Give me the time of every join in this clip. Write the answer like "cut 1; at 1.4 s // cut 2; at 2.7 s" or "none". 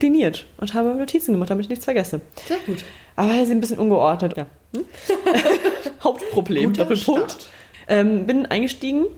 cut 1; at 4.3 s // cut 2; at 7.8 s